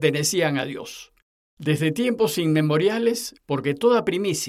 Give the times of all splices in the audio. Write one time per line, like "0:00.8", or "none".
0:01.4
0:03.4

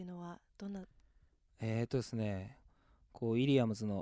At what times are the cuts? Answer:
0:02.6

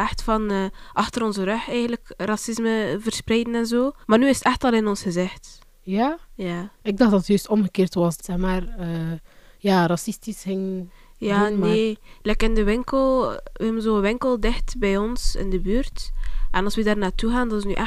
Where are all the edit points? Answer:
0:04.0
0:08.2

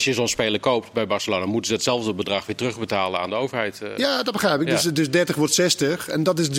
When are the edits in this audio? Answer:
none

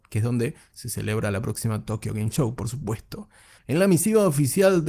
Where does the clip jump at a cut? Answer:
0:03.6

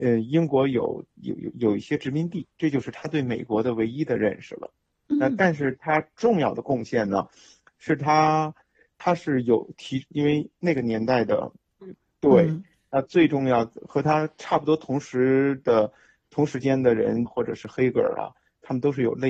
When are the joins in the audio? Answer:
0:10.1
0:11.8
0:17.3

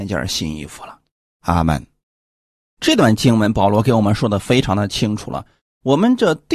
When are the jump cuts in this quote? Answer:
0:01.3

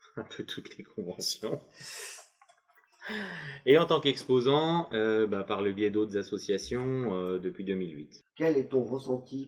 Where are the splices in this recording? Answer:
0:08.3

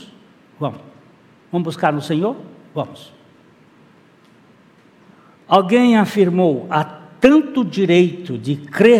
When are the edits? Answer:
0:05.4

